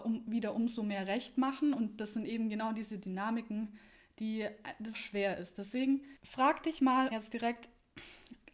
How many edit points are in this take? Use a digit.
2